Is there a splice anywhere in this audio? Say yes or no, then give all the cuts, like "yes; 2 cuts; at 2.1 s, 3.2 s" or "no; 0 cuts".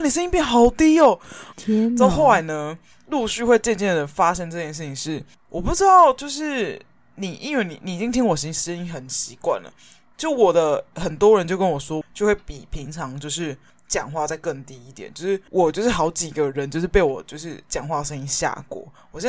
yes; 2 cuts; at 1.5 s, 12.0 s